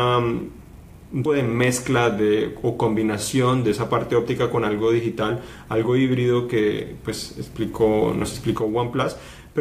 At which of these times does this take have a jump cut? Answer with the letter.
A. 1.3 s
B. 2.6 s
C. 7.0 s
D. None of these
A